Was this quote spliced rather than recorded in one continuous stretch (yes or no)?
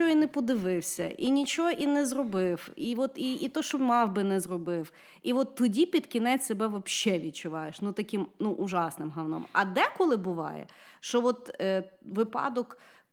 no